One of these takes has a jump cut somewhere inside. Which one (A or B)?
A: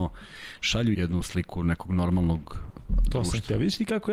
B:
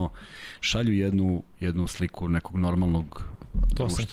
A